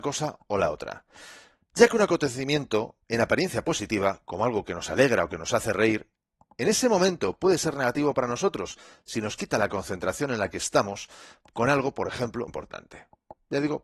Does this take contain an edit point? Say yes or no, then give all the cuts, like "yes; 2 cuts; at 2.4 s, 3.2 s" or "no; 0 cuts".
yes; 1 cut; at 12.5 s